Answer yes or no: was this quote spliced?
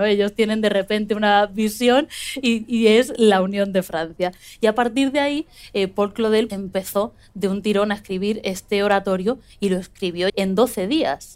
yes